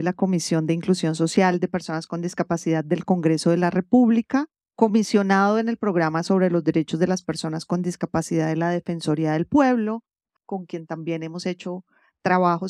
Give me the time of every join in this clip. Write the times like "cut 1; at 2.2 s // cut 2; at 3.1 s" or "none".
cut 1; at 10.4 s